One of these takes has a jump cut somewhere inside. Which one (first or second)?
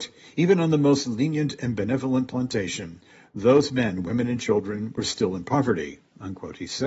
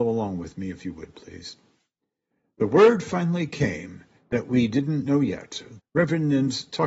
second